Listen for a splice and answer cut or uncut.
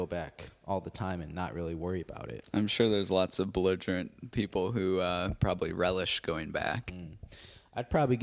uncut